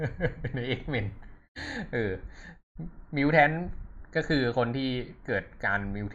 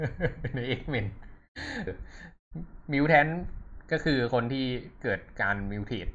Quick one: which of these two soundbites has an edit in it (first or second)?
second